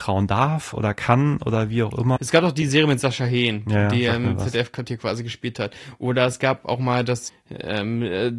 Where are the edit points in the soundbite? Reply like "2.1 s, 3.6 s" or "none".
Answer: 2.2 s, 7.3 s